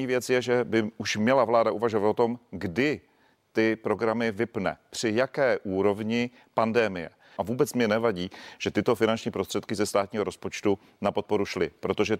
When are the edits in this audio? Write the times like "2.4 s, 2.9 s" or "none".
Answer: 7.4 s